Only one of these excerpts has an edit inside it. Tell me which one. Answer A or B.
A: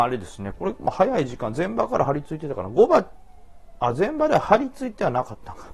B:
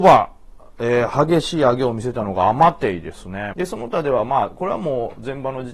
B